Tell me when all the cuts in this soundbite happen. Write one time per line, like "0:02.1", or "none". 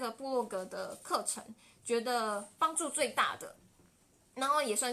none